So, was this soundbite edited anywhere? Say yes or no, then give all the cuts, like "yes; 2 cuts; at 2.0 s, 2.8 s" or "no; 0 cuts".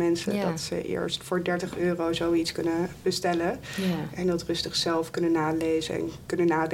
no; 0 cuts